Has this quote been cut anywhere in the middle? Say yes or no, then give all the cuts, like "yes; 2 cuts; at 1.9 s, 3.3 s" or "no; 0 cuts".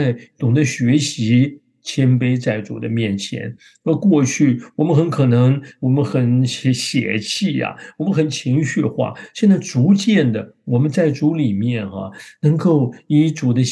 no; 0 cuts